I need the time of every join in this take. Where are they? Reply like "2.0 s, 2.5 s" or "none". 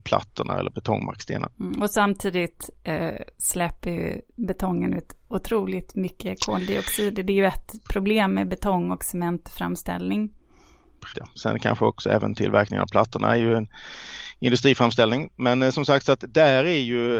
11.1 s